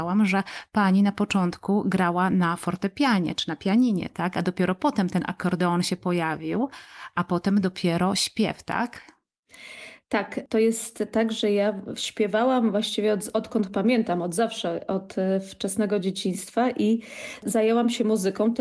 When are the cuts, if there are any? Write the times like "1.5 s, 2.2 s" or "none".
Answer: none